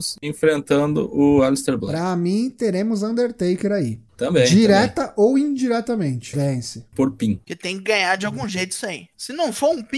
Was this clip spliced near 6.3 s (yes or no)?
yes